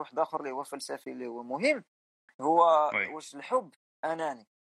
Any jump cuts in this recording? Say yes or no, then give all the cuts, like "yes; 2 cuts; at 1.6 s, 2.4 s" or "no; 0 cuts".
no; 0 cuts